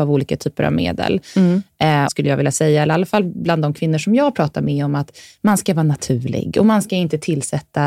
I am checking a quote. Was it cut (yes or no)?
yes